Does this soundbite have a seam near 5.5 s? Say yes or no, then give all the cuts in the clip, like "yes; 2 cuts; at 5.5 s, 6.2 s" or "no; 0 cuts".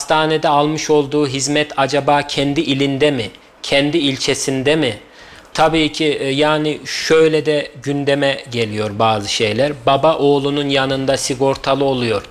yes; 1 cut; at 5.5 s